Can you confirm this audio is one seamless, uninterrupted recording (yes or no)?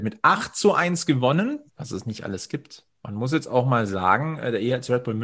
no